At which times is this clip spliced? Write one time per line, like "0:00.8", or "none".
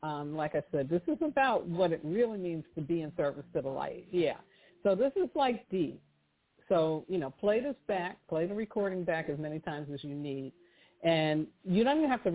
none